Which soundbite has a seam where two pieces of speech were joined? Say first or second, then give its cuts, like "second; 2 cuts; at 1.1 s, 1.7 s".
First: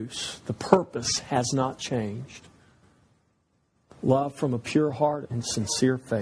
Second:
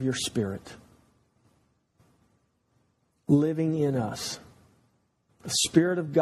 first; 1 cut; at 5.2 s